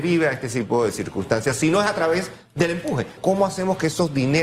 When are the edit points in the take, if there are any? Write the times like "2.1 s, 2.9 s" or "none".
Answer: 3.2 s